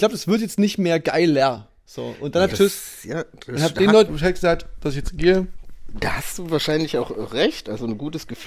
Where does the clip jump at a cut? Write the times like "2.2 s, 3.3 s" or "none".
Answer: 2.5 s, 4.1 s